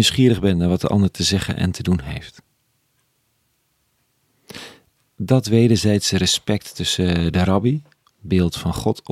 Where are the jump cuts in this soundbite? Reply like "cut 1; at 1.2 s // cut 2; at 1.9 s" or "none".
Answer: none